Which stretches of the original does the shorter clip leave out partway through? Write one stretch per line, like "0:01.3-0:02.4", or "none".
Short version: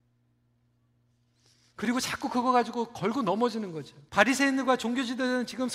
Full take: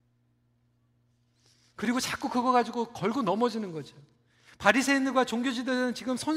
0:04.1-0:04.5

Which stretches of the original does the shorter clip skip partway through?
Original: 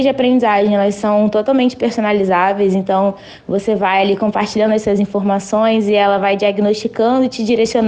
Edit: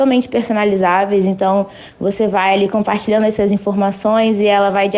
none

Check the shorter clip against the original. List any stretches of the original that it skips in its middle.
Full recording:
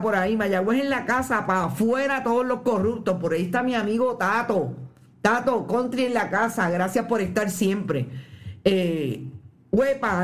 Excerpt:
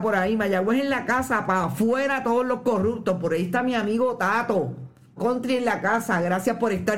0:05.2-0:05.6

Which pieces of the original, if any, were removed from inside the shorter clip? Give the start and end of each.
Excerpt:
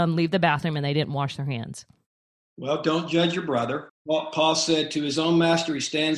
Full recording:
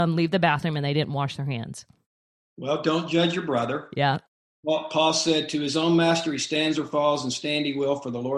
0:03.9-0:04.5

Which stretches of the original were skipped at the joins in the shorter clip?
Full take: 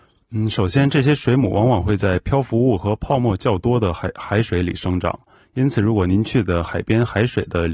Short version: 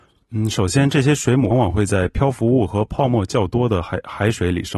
0:01.5-0:01.6

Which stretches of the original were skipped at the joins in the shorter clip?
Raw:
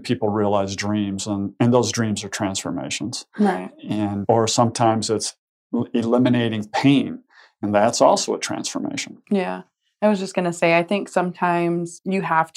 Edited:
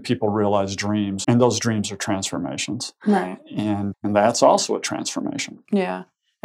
0:01.2-0:01.6
0:04.3-0:07.5

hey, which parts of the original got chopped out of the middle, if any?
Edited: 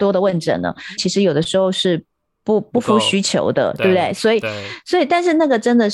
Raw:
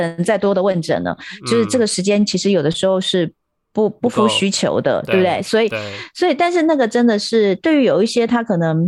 0:01.4-0:02.3

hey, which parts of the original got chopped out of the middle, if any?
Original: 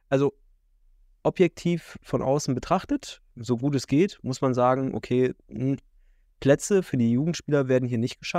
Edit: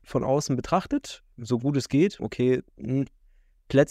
0:04.2-0:04.9

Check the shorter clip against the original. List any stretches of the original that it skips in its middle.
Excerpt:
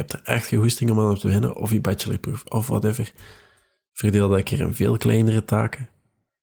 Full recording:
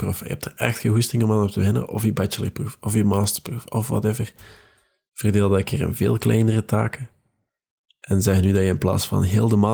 0:02.8-0:03.7

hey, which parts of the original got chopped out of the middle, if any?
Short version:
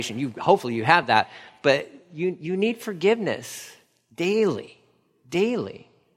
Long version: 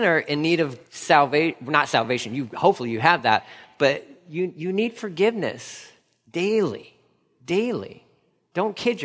none

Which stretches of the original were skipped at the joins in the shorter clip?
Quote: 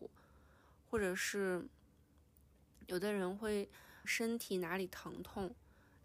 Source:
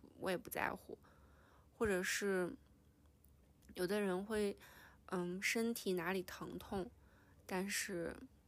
0:04.9-0:05.4

